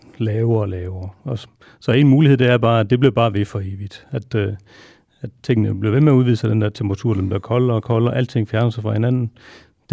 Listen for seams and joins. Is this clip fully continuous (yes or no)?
yes